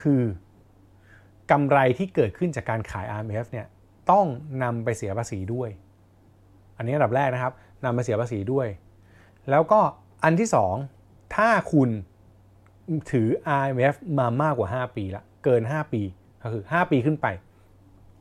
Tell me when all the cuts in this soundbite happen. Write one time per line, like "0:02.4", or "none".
none